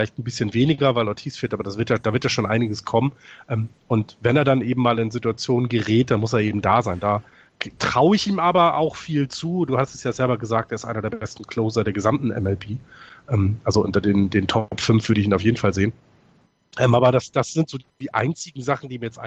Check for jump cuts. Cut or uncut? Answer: uncut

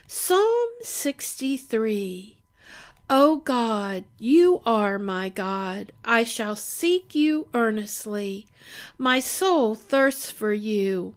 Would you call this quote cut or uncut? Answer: uncut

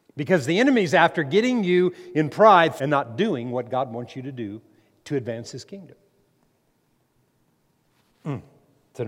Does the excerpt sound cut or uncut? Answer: cut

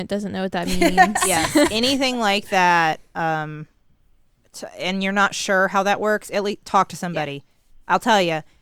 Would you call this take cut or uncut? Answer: uncut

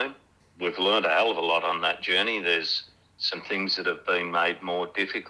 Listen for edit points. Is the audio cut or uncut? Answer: uncut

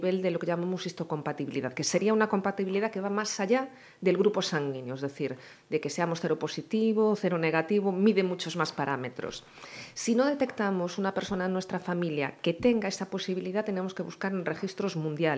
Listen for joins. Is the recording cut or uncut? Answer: uncut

